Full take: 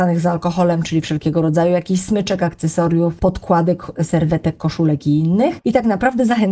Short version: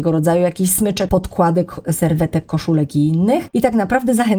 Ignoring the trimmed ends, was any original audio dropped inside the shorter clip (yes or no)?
yes